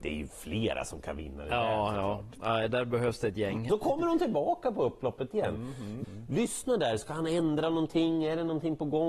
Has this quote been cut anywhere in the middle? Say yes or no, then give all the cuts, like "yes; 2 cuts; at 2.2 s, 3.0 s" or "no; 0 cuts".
yes; 2 cuts; at 3.7 s, 6.0 s